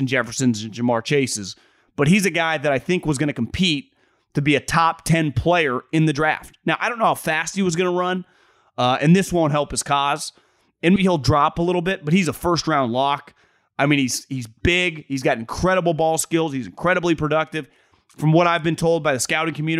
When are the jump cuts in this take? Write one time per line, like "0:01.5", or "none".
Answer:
0:11.0